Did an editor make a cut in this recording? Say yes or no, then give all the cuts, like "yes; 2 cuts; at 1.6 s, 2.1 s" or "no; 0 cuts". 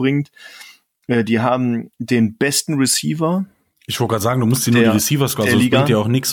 no; 0 cuts